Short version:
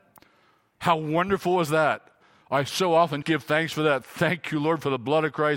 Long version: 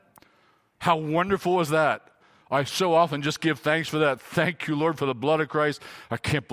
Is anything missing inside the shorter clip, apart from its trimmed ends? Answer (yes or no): yes